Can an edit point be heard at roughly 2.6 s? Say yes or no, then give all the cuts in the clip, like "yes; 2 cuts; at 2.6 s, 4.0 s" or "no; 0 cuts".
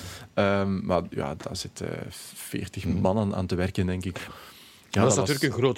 no; 2 cuts; at 1.4 s, 4.3 s